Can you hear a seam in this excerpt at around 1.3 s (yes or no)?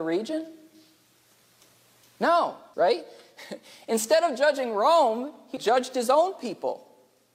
no